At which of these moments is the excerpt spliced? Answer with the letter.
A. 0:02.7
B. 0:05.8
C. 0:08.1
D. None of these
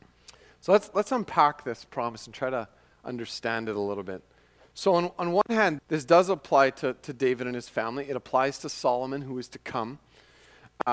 B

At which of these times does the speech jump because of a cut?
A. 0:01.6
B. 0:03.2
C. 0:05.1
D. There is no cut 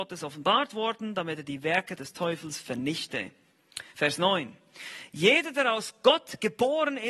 D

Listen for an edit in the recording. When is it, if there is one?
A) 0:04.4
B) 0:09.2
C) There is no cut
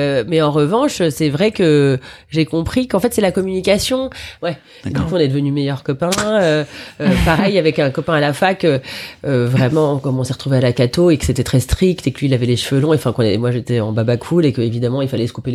A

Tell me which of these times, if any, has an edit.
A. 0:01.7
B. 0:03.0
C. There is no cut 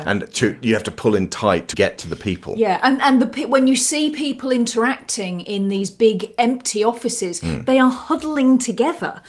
A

